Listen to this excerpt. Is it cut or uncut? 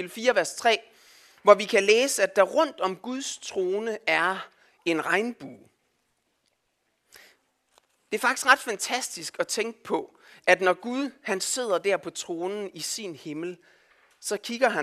uncut